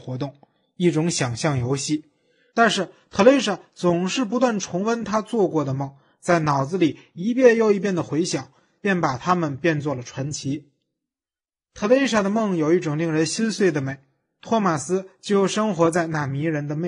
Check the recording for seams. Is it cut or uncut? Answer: cut